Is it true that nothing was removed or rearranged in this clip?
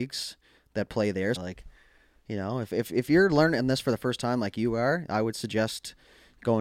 no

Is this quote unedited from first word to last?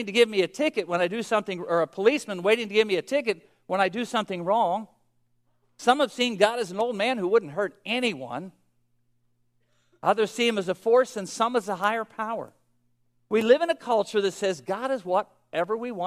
yes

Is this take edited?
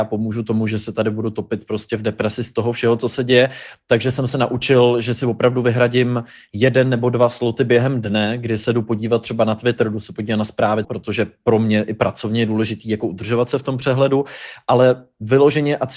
yes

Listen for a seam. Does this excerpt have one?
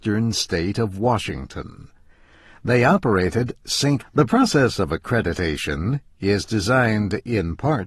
yes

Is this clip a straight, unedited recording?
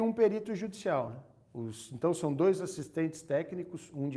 yes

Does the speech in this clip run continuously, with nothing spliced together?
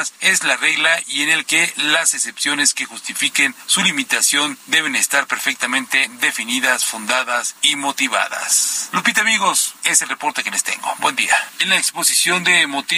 no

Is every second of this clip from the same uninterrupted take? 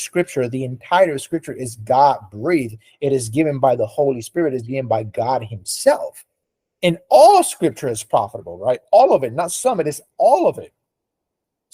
yes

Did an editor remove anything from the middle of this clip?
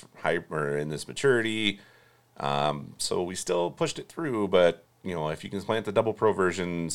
no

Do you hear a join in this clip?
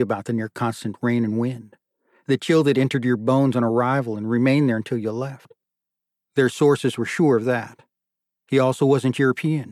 yes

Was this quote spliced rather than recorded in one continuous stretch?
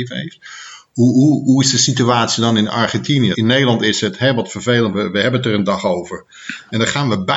yes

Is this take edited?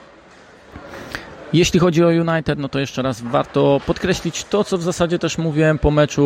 no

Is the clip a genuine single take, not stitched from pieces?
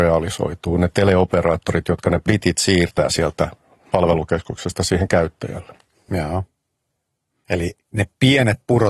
no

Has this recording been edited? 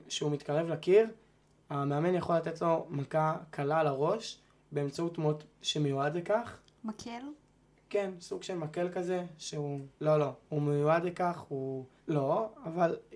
yes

